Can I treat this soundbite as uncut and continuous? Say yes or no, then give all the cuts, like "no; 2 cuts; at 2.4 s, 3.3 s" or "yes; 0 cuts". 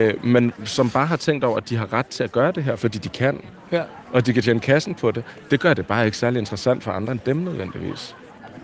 yes; 0 cuts